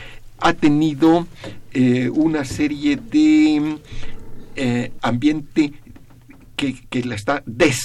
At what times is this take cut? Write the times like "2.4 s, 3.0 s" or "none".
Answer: 5.0 s